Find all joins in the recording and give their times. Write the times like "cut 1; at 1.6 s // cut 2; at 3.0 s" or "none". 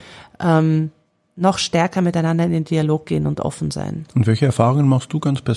none

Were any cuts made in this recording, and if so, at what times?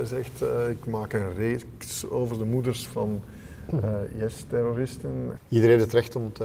cut 1; at 5.4 s

